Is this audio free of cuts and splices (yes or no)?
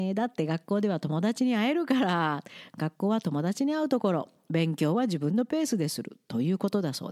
yes